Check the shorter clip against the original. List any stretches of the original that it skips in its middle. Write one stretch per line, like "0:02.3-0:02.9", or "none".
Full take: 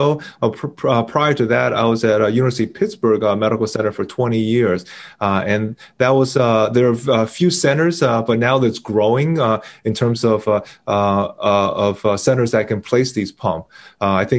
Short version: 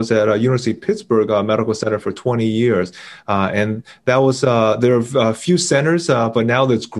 none